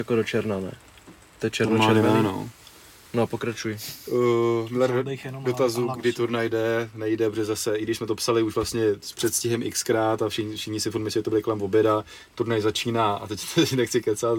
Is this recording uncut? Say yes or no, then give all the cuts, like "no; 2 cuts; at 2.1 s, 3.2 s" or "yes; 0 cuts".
no; 1 cut; at 5.9 s